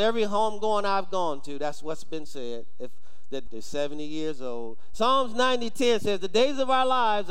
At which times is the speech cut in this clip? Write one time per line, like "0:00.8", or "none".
0:03.5
0:04.9

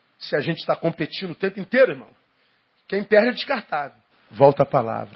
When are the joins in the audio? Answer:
0:04.1

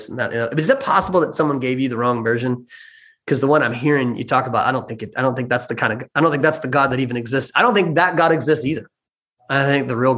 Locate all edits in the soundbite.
none

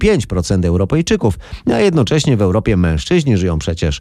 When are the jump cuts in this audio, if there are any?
none

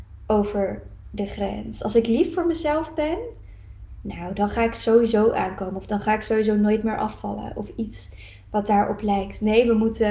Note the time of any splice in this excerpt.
none

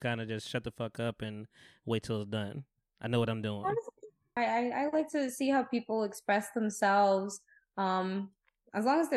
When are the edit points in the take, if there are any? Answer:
0:04.4

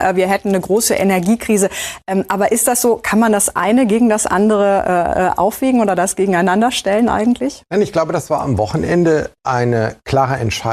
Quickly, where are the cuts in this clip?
0:07.7
0:09.4

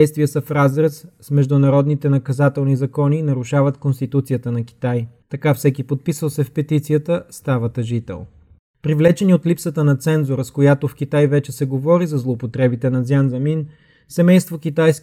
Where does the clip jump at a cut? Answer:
0:05.2

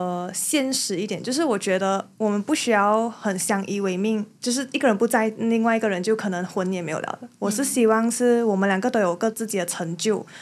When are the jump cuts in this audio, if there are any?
0:09.3

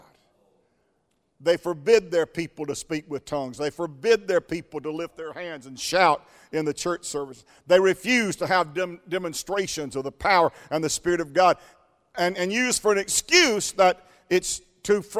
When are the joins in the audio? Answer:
none

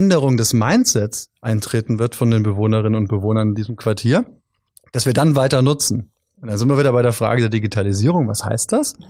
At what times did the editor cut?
none

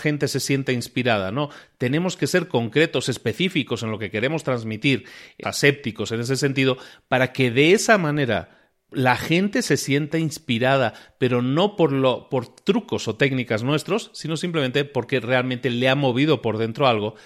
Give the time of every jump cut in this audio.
0:05.4

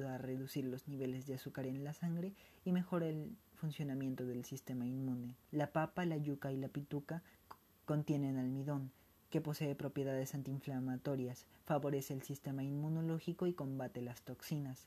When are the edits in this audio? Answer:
0:05.4

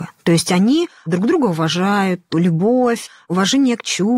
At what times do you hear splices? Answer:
none

